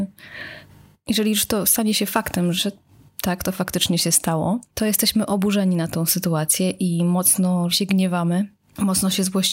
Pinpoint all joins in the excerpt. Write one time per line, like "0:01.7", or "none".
0:02.6
0:07.7